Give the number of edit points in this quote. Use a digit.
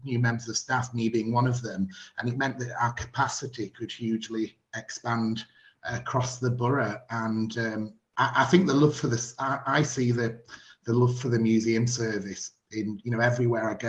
0